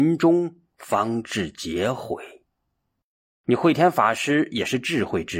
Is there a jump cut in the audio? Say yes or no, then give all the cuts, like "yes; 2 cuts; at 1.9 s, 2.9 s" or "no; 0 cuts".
yes; 1 cut; at 3.4 s